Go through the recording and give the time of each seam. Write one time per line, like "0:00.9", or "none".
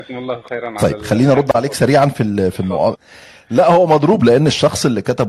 0:03.0

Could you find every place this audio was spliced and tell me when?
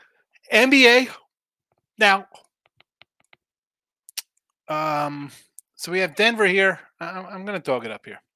none

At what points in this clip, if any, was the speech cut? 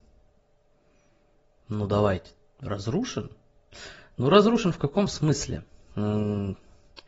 none

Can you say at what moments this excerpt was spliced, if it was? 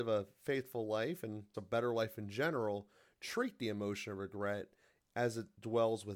0:01.5

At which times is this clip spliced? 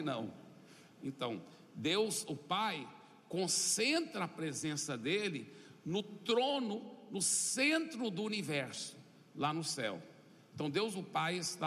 0:01.0

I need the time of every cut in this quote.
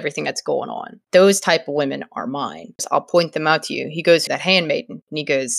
0:01.1
0:02.8
0:04.3

